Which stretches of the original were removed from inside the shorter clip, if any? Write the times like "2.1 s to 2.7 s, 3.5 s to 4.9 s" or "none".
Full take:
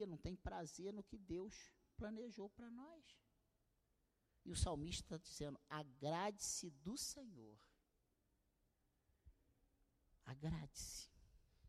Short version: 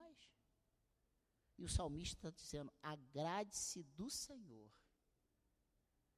none